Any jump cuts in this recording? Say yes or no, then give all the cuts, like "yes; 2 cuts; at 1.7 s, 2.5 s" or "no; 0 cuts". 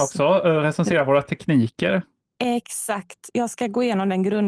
no; 0 cuts